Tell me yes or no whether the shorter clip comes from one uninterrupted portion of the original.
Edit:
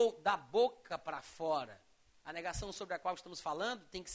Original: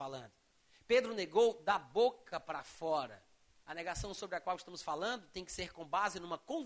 yes